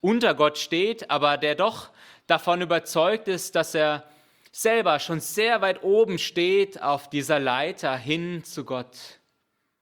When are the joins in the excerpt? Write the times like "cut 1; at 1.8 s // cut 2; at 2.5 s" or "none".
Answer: none